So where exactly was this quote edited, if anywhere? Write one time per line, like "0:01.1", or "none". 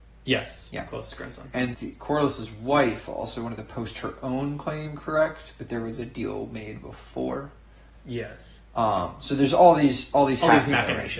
0:01.7